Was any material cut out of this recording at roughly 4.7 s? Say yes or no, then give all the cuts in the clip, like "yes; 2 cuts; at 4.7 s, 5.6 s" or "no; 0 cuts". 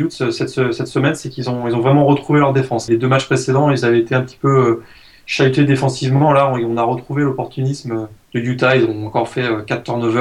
no; 2 cuts; at 2.9 s, 8.2 s